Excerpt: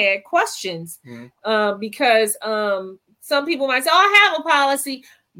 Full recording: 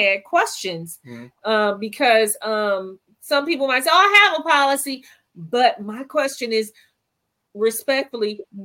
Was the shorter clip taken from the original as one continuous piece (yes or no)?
yes